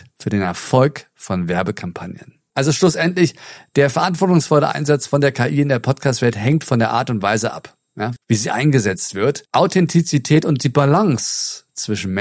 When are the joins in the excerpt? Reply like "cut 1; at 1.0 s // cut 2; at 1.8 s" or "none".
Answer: cut 1; at 8.2 s